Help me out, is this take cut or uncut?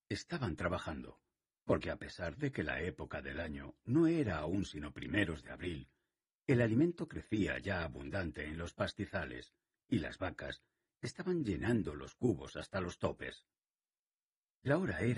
uncut